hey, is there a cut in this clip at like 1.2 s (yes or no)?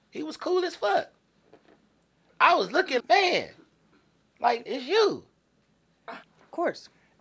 no